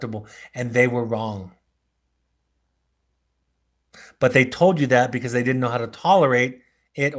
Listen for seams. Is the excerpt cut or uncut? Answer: uncut